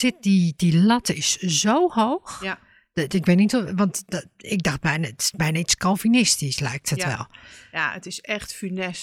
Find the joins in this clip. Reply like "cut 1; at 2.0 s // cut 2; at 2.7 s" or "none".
none